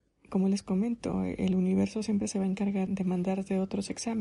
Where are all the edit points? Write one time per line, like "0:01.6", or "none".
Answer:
0:02.9